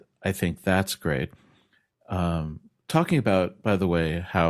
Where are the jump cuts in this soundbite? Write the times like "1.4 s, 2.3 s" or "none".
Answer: none